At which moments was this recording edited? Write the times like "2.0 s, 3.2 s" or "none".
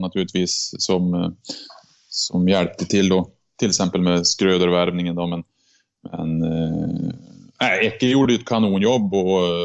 none